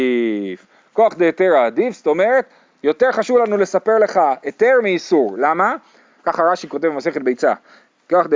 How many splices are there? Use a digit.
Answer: 1